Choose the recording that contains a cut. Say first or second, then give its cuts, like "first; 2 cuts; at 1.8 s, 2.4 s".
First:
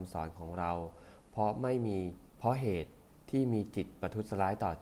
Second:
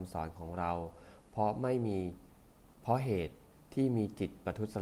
first; 1 cut; at 2.3 s